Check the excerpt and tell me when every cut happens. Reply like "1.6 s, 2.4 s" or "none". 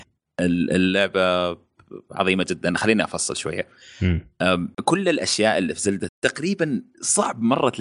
4.7 s, 6.1 s